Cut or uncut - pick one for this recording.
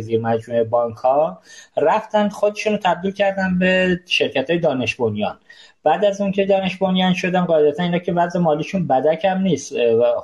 uncut